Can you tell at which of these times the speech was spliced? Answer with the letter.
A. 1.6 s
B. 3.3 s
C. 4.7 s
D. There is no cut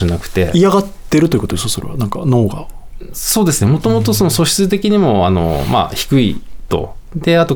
D